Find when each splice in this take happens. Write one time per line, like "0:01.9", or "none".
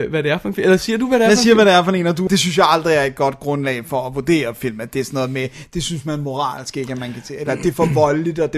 0:02.3